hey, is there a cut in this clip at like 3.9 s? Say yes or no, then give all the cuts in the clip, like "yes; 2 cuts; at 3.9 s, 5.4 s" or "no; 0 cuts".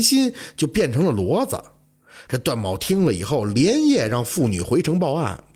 no; 1 cut; at 2.3 s